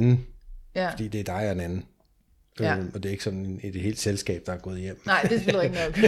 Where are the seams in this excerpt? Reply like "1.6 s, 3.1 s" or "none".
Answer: none